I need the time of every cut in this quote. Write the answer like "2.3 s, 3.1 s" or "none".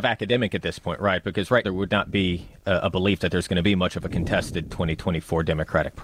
1.6 s